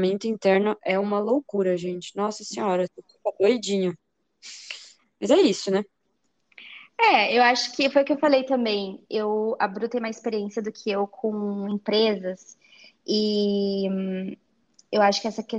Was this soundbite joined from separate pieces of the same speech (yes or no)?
no